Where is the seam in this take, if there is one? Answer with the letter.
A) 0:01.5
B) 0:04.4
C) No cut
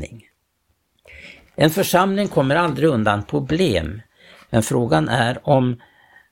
A